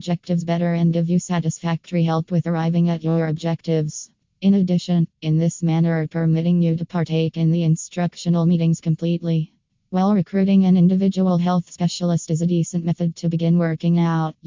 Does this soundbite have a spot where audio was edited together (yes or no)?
yes